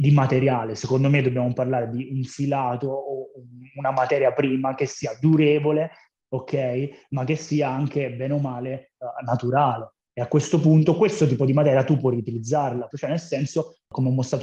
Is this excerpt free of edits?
no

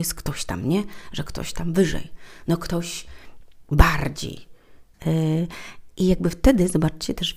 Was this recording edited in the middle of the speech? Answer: yes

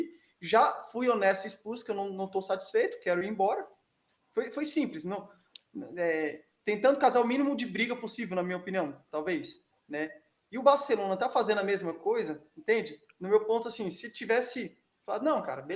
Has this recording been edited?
no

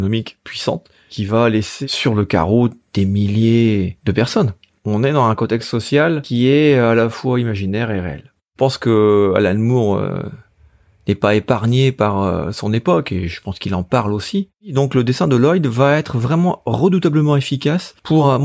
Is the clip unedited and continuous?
yes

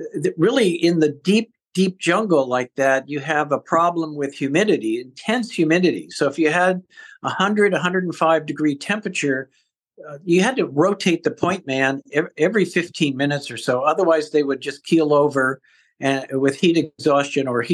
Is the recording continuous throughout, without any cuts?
yes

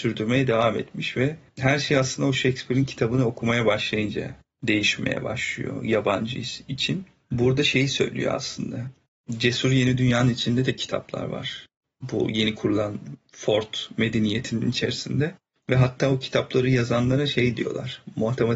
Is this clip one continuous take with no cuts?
yes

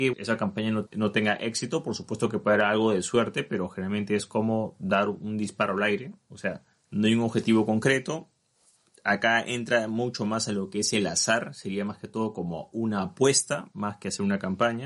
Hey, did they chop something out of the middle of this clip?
no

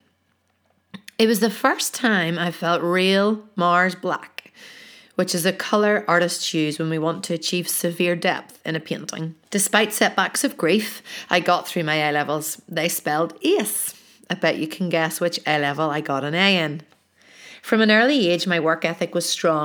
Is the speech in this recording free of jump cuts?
no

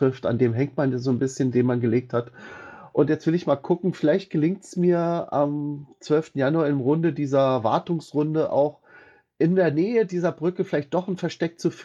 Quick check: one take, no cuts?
yes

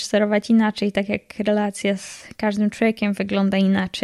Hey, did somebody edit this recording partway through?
no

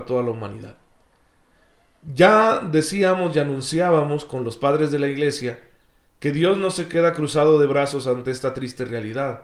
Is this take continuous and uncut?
yes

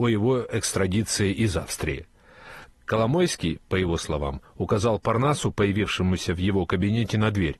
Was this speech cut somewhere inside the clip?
no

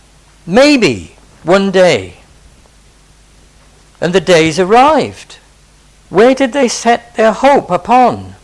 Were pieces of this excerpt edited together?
yes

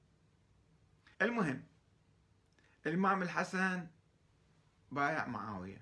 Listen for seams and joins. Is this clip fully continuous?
no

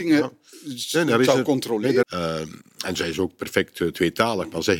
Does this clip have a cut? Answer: yes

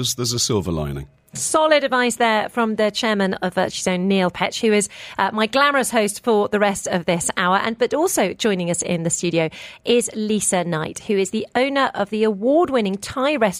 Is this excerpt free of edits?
yes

